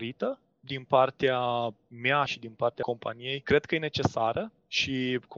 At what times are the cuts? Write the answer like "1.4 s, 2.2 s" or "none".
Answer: none